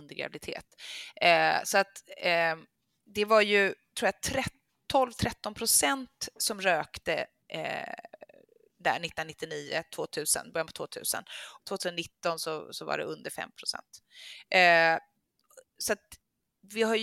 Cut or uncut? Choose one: cut